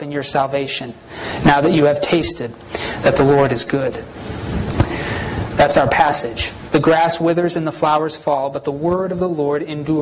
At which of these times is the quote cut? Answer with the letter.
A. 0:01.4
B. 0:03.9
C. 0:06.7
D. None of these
C